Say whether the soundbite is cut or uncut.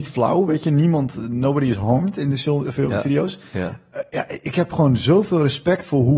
uncut